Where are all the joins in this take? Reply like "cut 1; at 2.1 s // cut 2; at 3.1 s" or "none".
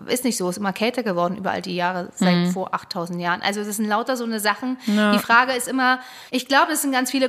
cut 1; at 6.3 s